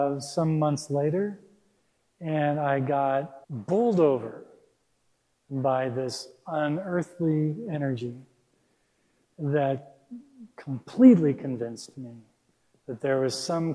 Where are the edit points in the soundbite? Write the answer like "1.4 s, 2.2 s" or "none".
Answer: 3.4 s